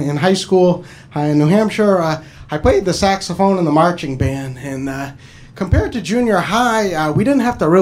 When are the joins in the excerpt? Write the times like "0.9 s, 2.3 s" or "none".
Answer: none